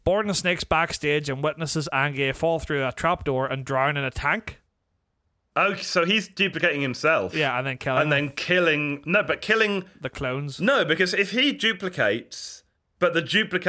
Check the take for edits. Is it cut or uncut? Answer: uncut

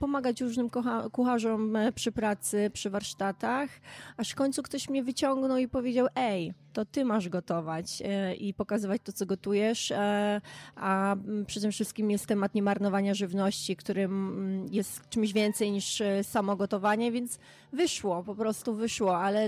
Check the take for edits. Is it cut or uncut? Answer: uncut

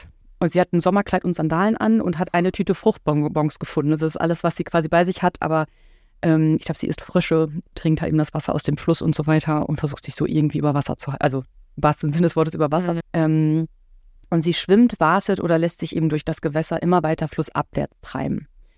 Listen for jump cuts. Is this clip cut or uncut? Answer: cut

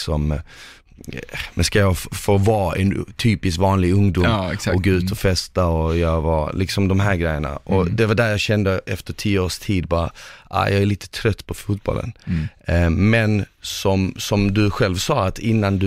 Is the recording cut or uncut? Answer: uncut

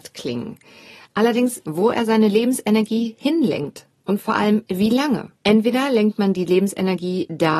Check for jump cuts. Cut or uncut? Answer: cut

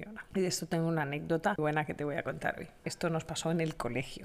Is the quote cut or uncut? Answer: cut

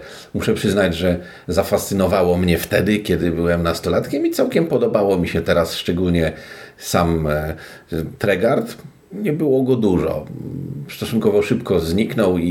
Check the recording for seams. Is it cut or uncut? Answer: uncut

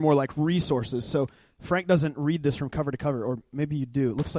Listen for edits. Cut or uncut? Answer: uncut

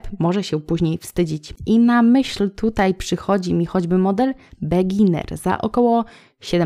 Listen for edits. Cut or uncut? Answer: uncut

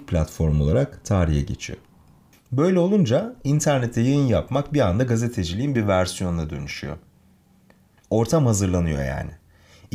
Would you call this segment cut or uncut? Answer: cut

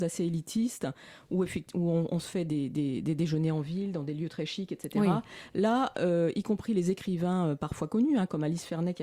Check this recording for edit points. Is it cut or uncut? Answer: uncut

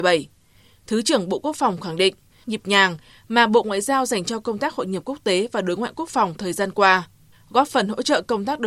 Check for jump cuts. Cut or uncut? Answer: cut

